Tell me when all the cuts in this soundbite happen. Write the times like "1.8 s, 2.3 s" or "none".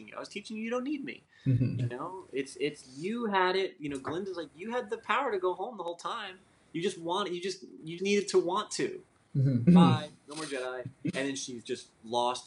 1.8 s, 8.0 s, 9.7 s